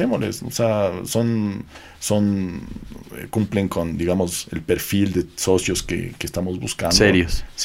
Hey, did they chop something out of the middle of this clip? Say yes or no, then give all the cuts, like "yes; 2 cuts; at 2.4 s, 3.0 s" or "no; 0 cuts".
no; 0 cuts